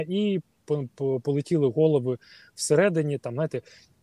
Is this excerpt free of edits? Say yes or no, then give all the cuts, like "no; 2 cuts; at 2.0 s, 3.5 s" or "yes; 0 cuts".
yes; 0 cuts